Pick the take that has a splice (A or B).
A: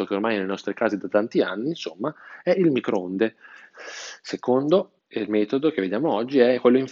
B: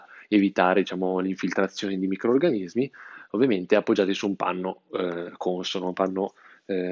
A